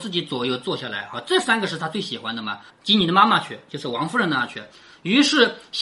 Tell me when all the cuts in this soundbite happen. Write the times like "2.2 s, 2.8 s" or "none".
2.7 s